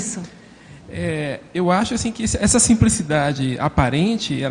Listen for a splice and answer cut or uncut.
uncut